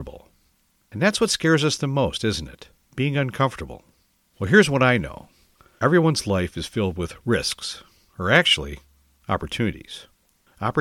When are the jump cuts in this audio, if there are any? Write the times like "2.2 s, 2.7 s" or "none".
none